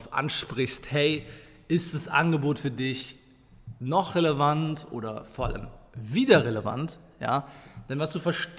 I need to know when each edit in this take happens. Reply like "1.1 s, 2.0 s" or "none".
none